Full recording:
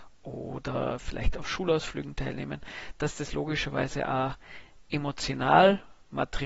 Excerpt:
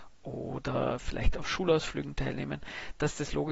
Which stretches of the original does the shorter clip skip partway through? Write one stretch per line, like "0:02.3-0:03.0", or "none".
none

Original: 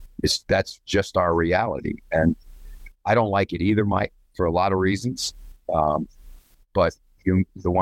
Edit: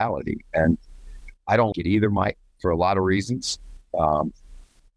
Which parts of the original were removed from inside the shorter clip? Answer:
0:03.3-0:03.5

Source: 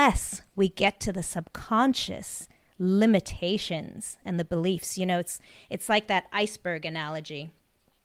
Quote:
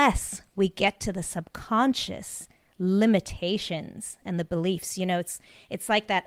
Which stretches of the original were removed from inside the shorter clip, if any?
none

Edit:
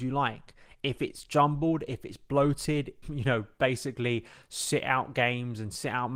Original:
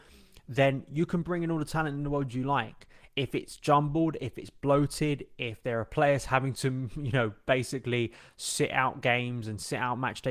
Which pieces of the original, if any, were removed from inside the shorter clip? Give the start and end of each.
0:05.4-0:06.9

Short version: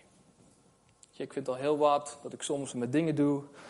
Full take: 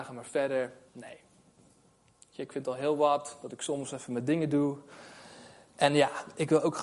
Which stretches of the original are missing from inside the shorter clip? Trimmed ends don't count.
0:03.9-0:04.1

